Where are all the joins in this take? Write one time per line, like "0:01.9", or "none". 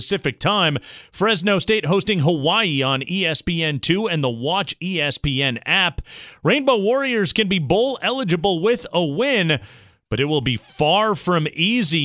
none